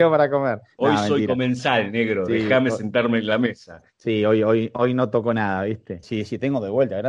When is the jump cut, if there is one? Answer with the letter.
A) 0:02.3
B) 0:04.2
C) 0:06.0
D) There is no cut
C